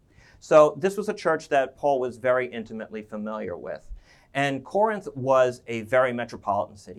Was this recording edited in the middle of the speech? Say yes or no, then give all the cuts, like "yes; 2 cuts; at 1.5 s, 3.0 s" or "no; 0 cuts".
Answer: no; 0 cuts